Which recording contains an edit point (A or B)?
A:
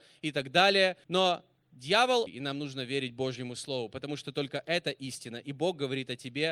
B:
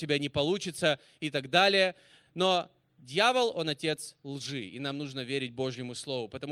A